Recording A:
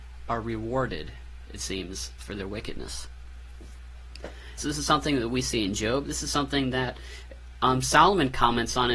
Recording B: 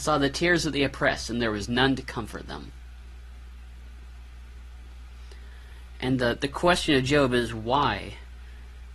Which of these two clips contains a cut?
A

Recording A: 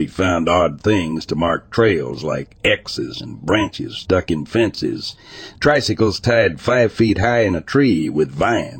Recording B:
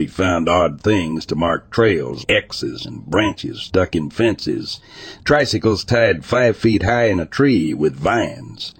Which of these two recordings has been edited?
B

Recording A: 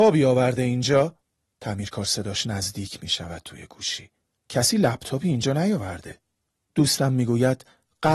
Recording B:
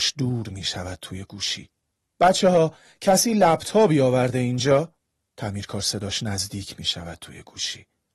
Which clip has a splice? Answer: A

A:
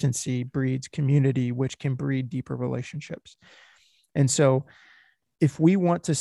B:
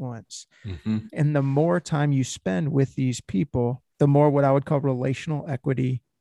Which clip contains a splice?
B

